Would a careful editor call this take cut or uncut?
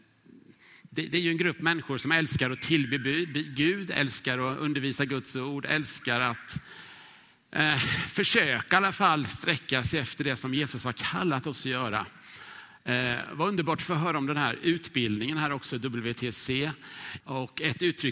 cut